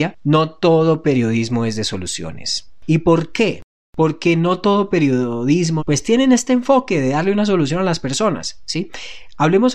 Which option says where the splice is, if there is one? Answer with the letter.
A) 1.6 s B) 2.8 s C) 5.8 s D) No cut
C